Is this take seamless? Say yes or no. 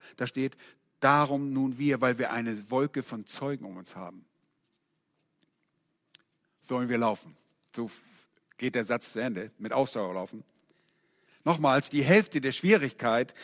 no